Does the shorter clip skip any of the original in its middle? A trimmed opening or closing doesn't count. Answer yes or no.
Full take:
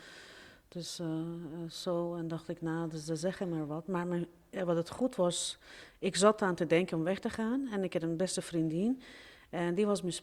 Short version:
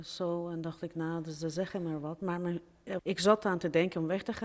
yes